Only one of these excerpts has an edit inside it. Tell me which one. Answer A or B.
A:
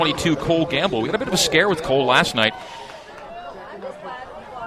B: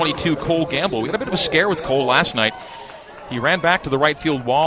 A